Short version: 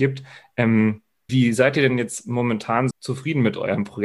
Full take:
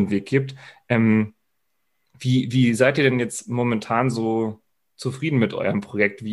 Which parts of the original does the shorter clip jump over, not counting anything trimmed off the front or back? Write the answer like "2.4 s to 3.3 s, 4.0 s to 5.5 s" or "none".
1.6 s to 2.5 s, 4.1 s to 4.9 s